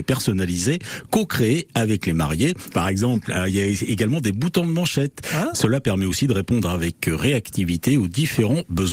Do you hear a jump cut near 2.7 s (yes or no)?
yes